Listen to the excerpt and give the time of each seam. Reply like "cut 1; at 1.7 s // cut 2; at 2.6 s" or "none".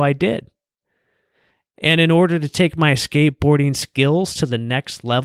none

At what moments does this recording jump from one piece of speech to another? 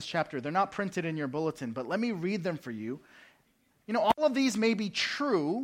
cut 1; at 3.7 s

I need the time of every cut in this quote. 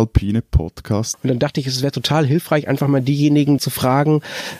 cut 1; at 1.1 s // cut 2; at 3.6 s

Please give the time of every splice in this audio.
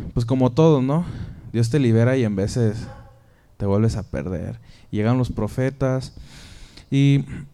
none

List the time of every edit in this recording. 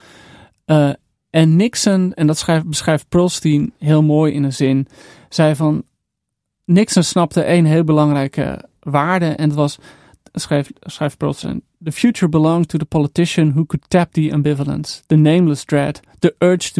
none

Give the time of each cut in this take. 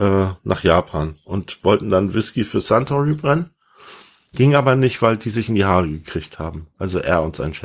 none

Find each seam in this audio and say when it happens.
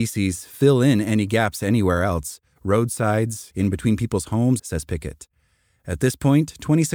cut 1; at 3.5 s // cut 2; at 4.6 s

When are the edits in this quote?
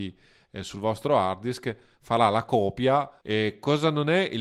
cut 1; at 3.2 s

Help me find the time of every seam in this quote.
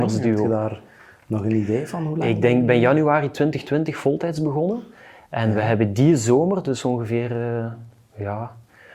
none

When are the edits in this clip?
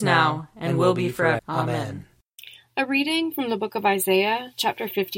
cut 1; at 1.4 s

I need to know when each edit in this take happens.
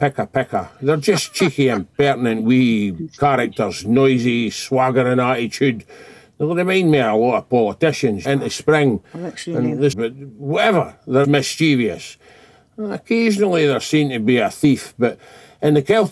cut 1; at 8.2 s // cut 2; at 9.9 s // cut 3; at 11.2 s

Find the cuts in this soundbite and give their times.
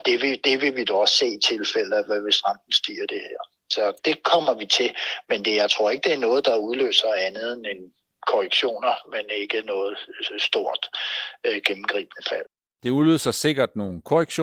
cut 1; at 4.0 s

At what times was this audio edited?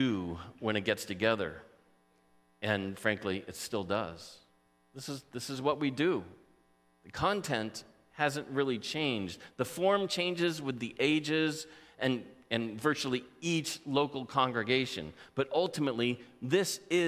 none

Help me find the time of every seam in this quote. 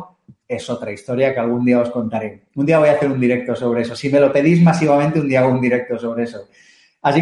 none

